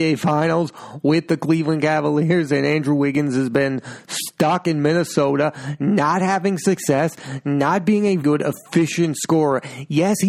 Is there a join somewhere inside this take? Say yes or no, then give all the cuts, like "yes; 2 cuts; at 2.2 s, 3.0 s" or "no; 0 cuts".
yes; 1 cut; at 8.2 s